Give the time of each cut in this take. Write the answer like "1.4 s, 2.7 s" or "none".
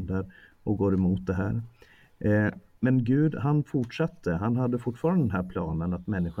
none